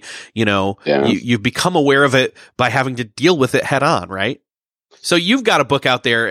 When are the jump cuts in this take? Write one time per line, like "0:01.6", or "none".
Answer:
0:04.9